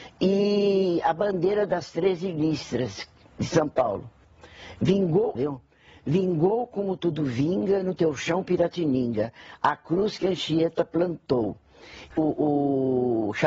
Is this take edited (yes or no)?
yes